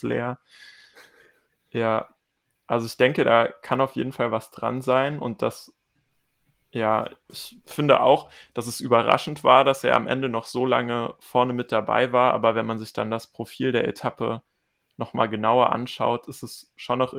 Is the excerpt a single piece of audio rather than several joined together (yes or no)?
yes